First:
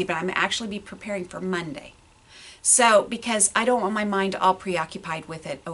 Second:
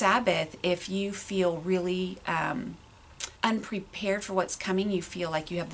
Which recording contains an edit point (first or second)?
second